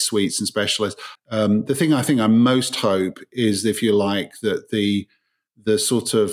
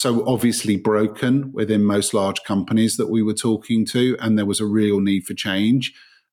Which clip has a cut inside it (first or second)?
first